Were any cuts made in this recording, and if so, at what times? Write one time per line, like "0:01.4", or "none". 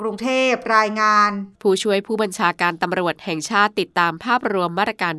0:01.5